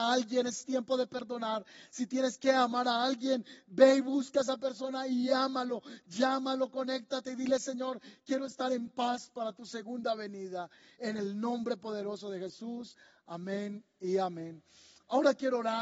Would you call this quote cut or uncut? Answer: uncut